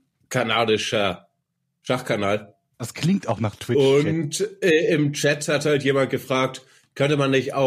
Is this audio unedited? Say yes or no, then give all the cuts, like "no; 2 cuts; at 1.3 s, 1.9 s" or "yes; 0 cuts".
yes; 0 cuts